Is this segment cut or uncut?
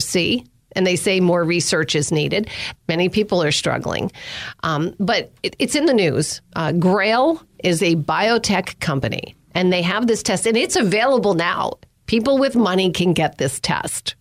cut